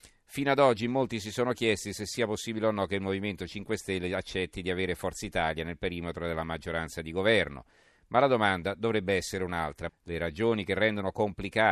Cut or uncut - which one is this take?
cut